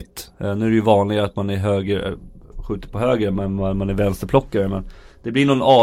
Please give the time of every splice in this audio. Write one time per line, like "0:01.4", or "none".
none